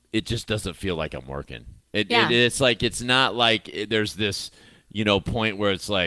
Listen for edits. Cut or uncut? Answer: uncut